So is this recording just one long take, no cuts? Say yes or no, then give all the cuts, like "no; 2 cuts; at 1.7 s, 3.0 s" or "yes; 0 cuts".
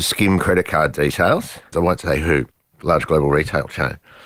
no; 1 cut; at 1.7 s